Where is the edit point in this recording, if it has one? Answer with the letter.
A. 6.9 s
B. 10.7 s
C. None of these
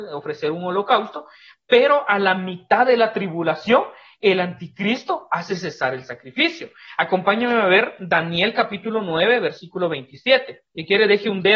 B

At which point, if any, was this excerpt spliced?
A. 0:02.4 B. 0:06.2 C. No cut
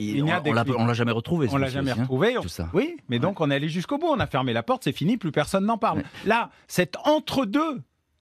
A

